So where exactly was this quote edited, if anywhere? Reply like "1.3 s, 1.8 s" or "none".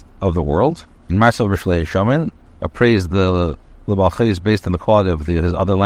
1.1 s, 2.5 s